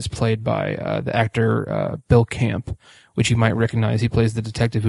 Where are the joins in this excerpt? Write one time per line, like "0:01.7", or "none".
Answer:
none